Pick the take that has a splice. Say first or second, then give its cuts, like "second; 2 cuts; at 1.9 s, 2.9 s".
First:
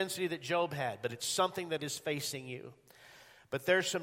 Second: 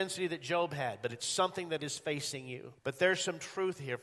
second; 1 cut; at 2.8 s